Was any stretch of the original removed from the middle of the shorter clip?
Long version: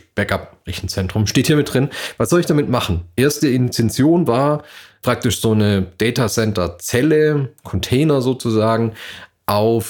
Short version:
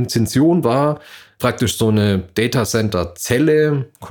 no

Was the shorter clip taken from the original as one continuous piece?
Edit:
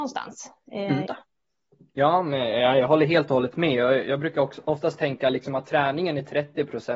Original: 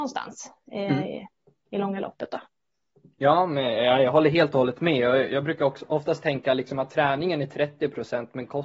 no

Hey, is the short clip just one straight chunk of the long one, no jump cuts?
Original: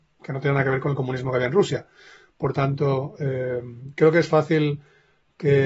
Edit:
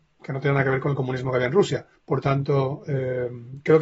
no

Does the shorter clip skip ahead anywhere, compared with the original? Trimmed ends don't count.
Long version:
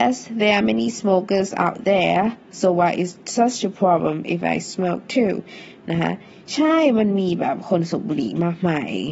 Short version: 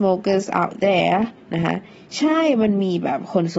yes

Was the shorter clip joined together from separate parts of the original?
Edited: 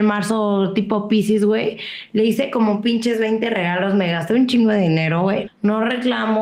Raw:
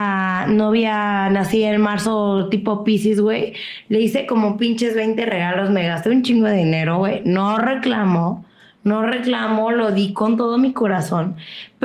yes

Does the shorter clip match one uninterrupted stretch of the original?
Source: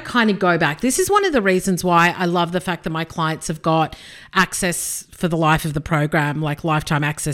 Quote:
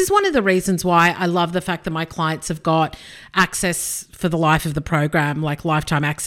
yes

